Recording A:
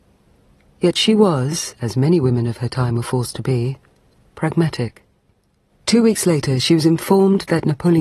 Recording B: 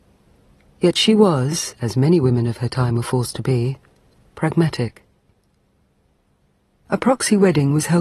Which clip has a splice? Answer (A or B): A